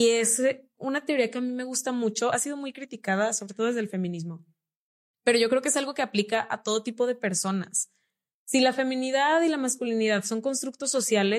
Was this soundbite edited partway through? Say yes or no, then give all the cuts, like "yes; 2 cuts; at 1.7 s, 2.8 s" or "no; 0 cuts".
no; 0 cuts